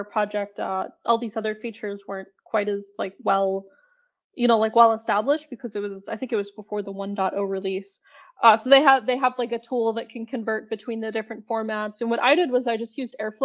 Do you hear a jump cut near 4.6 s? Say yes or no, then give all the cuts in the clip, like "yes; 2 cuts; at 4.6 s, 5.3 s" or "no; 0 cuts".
no; 0 cuts